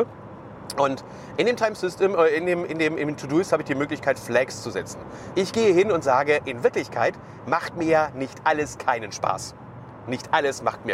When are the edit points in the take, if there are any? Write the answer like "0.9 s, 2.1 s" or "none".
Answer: 5.3 s